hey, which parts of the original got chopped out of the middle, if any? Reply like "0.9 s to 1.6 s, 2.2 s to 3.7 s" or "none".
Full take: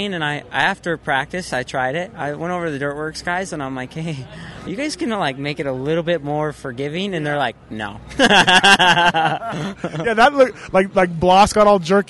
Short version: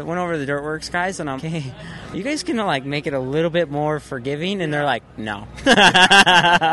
3.7 s to 3.9 s